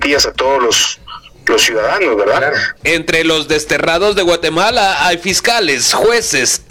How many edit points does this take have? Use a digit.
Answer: 1